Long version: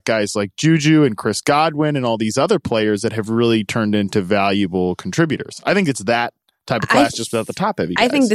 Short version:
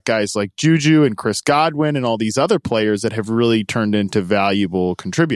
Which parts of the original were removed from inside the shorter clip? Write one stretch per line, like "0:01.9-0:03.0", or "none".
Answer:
none